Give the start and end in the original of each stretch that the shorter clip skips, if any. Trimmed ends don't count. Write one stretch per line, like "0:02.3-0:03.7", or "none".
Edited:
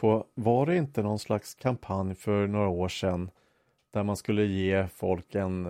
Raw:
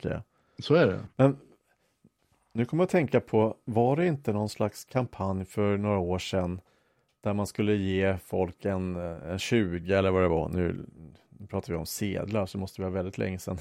none